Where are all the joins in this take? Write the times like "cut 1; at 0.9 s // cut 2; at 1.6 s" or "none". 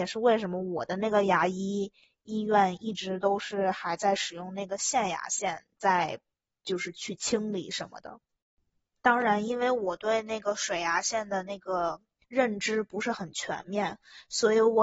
none